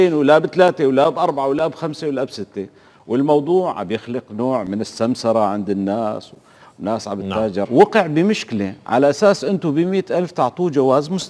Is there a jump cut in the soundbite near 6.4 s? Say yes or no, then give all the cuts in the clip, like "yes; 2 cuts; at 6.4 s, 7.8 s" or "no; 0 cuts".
no; 1 cut; at 7.7 s